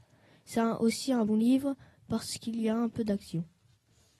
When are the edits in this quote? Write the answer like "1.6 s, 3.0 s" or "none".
1.3 s